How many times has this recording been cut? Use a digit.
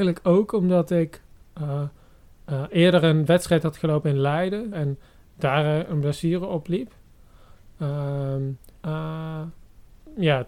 2